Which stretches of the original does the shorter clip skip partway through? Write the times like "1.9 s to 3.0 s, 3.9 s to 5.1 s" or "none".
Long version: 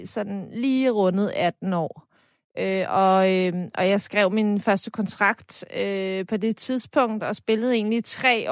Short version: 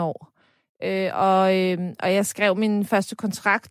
none